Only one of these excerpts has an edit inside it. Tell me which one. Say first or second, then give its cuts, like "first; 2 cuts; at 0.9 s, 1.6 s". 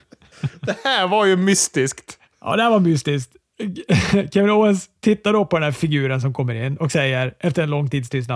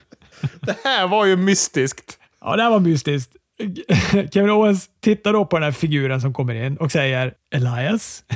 second; 1 cut; at 7.4 s